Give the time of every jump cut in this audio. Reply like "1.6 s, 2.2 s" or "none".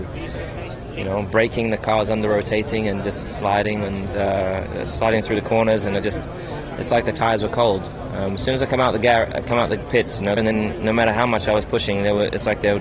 10.4 s